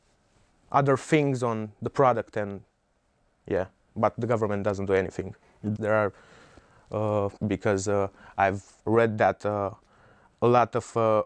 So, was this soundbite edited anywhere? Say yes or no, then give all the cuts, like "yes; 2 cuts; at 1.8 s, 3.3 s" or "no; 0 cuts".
yes; 3 cuts; at 5.8 s, 7.4 s, 8.8 s